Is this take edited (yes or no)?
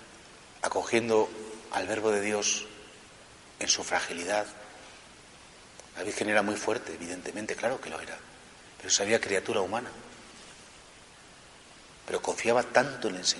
no